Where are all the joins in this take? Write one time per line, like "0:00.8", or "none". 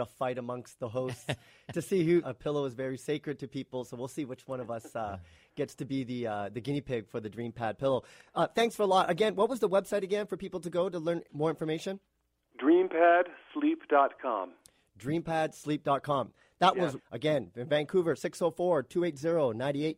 0:02.2
0:17.0